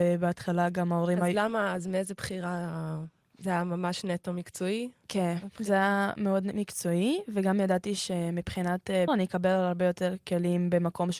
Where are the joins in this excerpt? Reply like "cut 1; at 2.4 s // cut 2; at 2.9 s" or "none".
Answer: cut 1; at 9.1 s